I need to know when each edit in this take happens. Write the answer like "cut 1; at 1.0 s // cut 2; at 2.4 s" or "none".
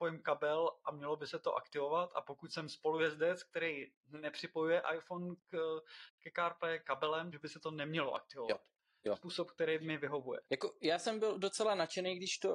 cut 1; at 7.3 s // cut 2; at 9.1 s // cut 3; at 10.5 s